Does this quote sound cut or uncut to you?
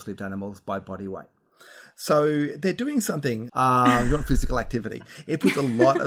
cut